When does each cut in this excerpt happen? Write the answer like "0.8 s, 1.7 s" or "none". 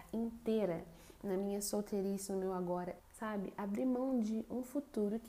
3.0 s